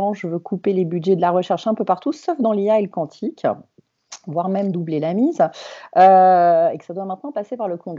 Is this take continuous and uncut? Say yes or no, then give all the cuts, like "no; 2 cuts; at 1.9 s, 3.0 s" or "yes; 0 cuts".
yes; 0 cuts